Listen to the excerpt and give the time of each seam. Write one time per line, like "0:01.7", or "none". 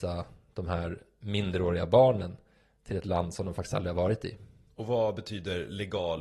none